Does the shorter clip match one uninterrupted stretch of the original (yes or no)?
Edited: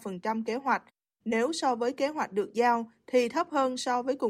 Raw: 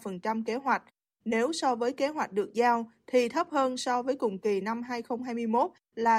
yes